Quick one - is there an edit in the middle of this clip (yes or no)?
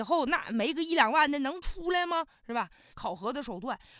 yes